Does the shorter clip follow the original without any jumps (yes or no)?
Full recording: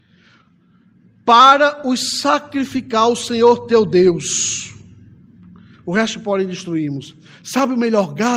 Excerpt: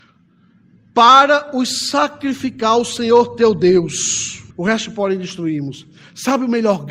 no